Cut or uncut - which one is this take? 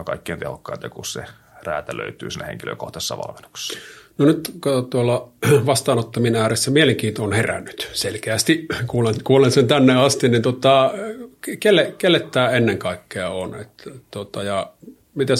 uncut